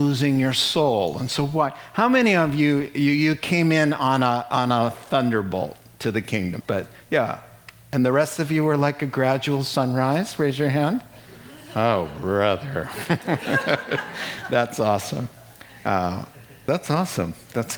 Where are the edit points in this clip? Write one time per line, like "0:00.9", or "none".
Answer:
0:06.6